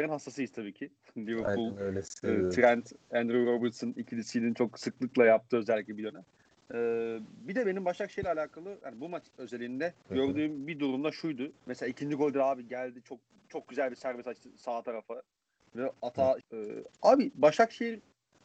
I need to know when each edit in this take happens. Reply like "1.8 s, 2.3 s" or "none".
10.0 s, 11.6 s, 16.4 s